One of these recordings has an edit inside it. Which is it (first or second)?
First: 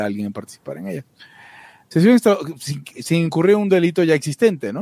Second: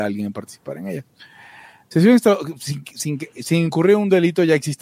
first